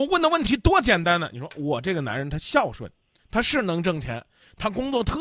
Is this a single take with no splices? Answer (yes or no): no